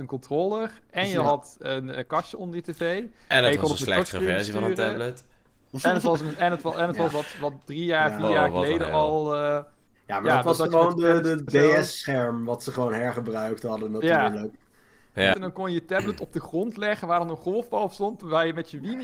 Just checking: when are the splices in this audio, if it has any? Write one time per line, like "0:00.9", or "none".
0:07.1
0:11.5
0:15.3